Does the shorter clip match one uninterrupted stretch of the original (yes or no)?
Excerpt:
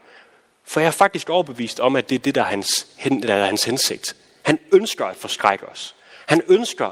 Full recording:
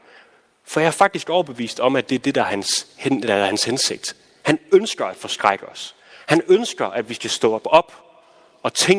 yes